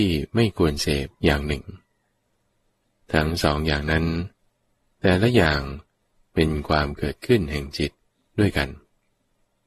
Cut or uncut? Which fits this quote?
cut